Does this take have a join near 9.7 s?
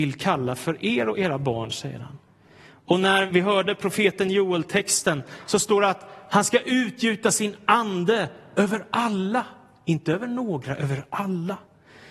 no; 1 cut; at 3.3 s

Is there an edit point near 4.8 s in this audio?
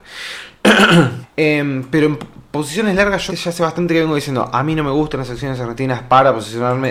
no; 2 cuts; at 1.2 s, 3.3 s

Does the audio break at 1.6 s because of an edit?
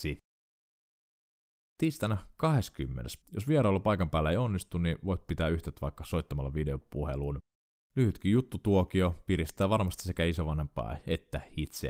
no; 1 cut; at 3.2 s

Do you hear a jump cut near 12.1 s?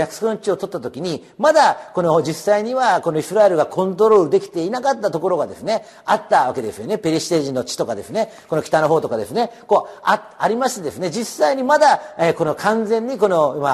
no; 0 cuts

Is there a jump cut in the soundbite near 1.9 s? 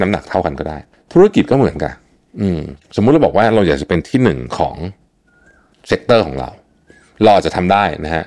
yes; 1 cut; at 1.9 s

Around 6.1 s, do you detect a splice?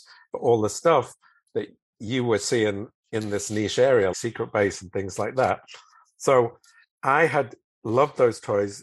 no; 1 cut; at 4.1 s

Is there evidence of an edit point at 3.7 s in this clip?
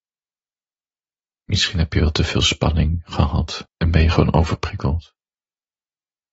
yes; 1 cut; at 3.7 s

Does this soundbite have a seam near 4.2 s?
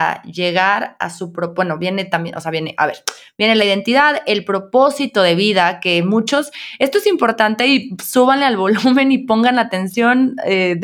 no; 0 cuts

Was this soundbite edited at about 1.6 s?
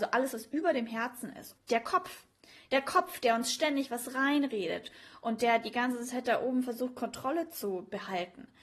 yes; 1 cut; at 1.6 s

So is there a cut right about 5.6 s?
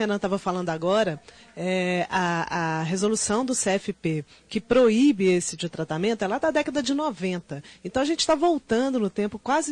yes; 1 cut; at 5.6 s

